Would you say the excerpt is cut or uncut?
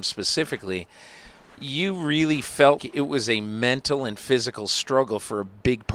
cut